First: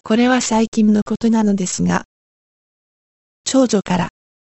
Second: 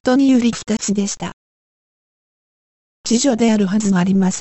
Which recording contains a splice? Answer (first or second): second